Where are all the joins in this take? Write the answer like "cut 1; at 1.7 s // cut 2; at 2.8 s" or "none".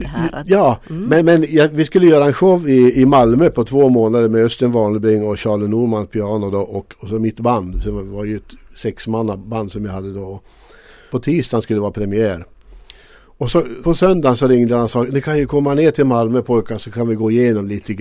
cut 1; at 11.1 s // cut 2; at 13.8 s